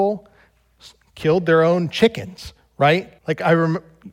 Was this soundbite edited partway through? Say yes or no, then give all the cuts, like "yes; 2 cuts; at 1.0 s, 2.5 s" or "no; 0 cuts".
yes; 1 cut; at 3.2 s